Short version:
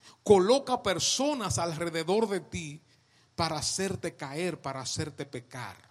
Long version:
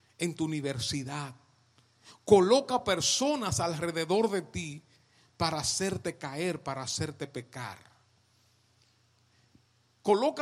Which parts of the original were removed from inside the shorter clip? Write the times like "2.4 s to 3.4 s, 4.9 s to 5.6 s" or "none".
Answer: none